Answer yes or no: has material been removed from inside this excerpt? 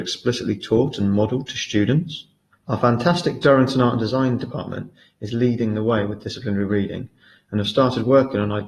yes